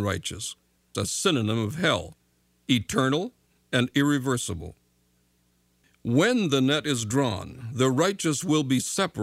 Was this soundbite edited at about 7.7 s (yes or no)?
no